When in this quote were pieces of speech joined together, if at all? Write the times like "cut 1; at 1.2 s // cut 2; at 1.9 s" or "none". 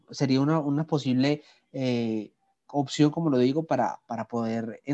none